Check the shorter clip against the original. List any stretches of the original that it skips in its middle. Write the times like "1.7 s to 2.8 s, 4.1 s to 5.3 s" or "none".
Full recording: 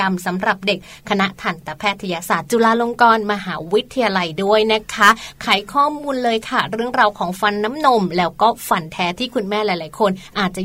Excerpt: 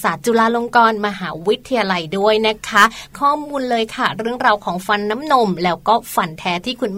5.4 s to 5.7 s